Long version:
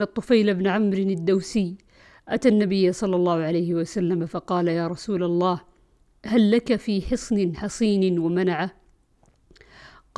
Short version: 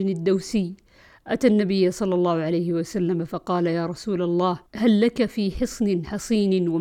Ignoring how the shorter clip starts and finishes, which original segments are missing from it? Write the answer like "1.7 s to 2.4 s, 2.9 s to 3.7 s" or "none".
5.7 s to 6.2 s